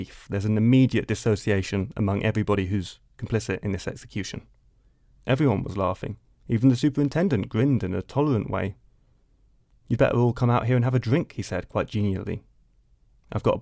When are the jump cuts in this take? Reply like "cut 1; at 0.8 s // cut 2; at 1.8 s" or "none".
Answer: cut 1; at 5.1 s